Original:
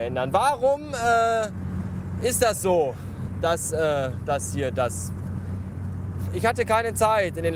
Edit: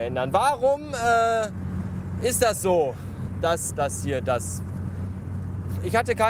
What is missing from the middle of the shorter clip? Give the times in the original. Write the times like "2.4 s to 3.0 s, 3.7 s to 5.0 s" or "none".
3.7 s to 4.2 s